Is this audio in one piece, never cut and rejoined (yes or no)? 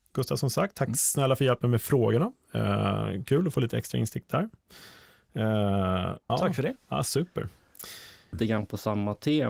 no